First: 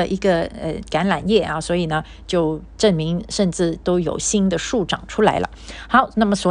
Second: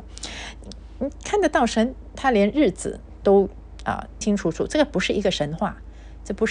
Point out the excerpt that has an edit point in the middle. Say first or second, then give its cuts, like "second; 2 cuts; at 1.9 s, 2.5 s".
second; 1 cut; at 4.2 s